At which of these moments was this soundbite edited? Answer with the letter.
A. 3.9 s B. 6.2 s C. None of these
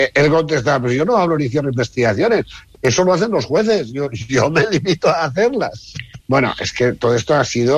B